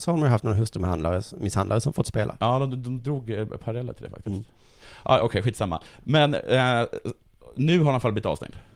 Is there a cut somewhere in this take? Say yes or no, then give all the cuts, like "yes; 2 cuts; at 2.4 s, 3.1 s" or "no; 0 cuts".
no; 0 cuts